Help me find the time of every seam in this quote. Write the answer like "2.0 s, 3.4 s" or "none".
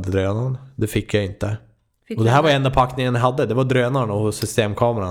none